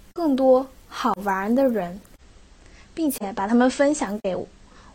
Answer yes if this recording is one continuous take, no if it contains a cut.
yes